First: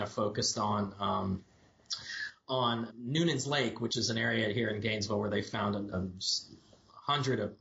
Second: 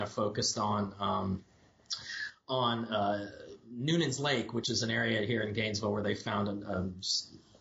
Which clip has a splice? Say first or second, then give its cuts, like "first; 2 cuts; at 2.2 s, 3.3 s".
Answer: first; 2 cuts; at 2.9 s, 5.9 s